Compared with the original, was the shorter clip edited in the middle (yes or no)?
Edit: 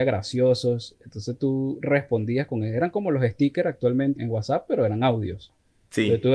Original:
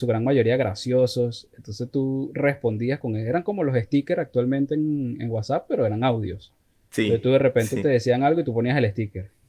yes